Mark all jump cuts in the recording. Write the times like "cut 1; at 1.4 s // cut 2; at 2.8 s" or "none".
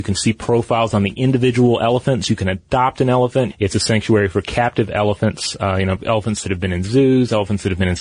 cut 1; at 3.5 s

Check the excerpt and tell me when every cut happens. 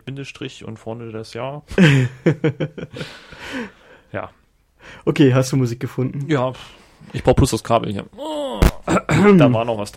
cut 1; at 8.8 s

